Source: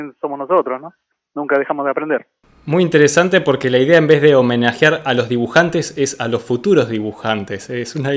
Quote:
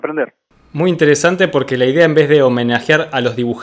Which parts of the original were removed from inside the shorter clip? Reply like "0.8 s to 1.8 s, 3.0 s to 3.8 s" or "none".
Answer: none